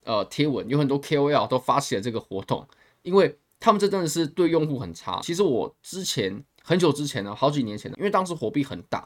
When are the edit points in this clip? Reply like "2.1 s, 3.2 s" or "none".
5.2 s, 7.9 s